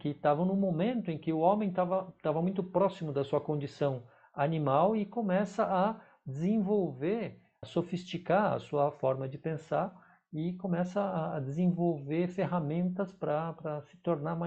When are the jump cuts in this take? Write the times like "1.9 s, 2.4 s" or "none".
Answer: 7.6 s